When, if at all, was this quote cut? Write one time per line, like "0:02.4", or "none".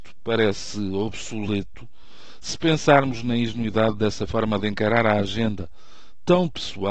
none